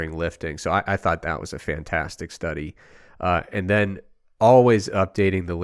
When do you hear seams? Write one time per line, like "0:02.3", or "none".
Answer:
none